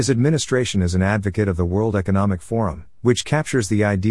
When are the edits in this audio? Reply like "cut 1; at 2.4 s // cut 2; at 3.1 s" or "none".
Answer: cut 1; at 3.0 s